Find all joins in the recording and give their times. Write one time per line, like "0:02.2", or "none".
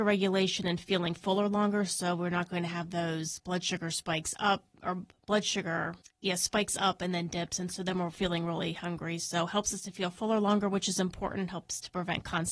0:06.0